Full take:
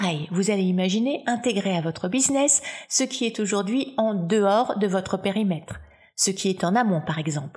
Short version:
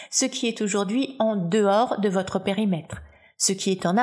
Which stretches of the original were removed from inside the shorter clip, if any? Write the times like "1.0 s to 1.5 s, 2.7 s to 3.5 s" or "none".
none